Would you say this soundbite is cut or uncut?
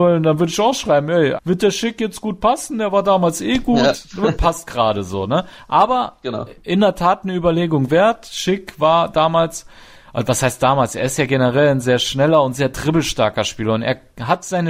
cut